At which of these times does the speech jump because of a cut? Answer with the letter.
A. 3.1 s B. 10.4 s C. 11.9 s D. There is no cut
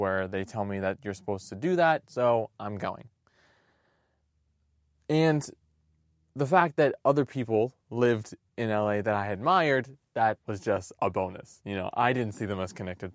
B